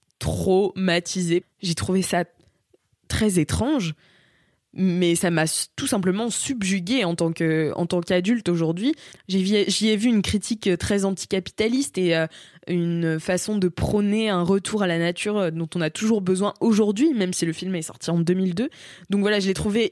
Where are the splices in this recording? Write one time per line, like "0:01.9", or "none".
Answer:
0:01.4